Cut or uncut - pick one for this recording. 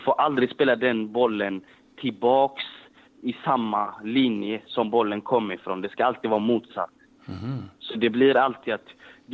uncut